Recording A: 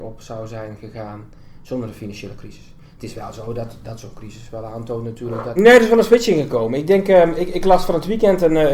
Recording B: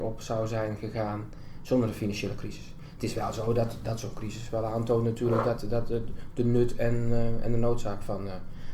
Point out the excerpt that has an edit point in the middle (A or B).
A